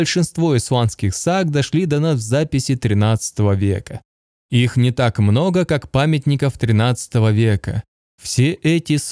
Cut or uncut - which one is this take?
cut